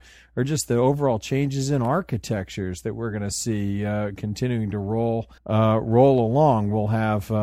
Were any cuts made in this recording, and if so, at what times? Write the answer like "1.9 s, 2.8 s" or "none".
5.4 s